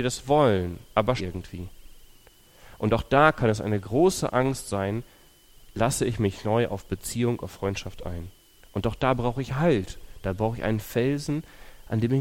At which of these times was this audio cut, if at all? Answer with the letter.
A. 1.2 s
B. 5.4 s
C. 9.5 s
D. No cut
A